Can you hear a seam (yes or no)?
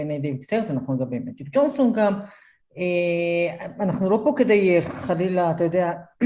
no